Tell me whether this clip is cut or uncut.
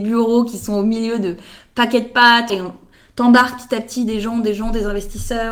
cut